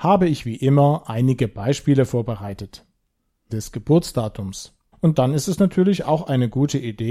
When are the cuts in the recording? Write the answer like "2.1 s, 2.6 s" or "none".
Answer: 3.5 s, 4.9 s